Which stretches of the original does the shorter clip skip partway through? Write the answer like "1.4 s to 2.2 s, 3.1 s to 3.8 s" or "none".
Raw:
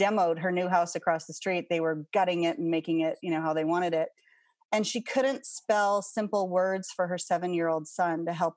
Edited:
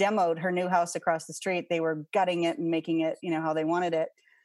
none